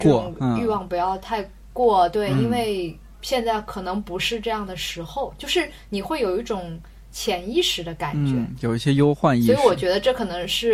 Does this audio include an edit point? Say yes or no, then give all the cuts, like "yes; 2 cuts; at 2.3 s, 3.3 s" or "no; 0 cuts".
no; 0 cuts